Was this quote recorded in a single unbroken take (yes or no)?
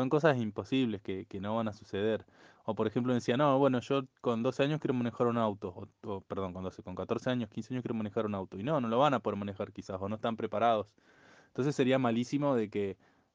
yes